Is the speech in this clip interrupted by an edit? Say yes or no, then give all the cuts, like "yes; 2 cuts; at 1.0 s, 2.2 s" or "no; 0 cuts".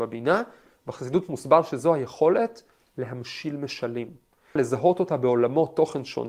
yes; 1 cut; at 4.6 s